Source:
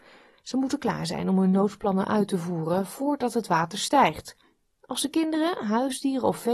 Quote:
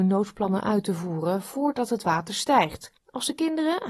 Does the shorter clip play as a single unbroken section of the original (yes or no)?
no